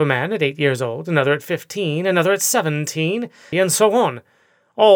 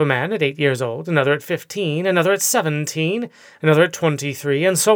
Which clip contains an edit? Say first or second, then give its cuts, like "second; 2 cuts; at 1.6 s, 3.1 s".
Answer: first; 1 cut; at 3.5 s